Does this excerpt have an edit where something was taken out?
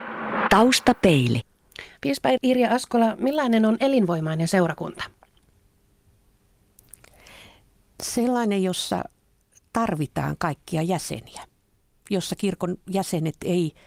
no; 0 cuts

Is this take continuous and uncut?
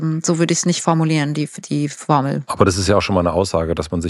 yes; 0 cuts

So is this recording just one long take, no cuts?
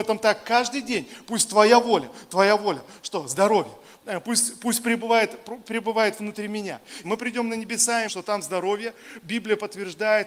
no; 2 cuts; at 7.0 s, 8.1 s

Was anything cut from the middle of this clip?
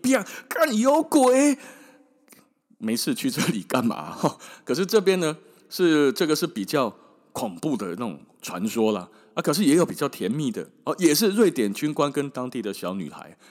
no; 0 cuts

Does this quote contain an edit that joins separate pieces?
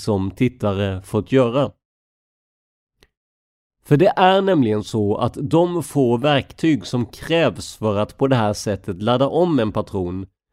no; 0 cuts

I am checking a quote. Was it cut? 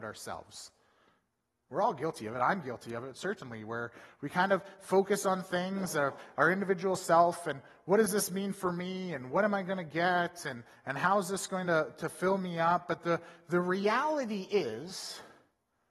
no; 0 cuts

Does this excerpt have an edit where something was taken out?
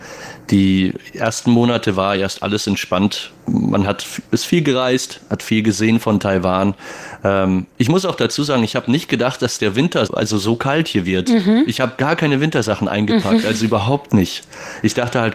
yes; 1 cut; at 10.1 s

